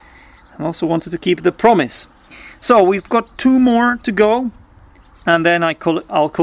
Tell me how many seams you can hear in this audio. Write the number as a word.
zero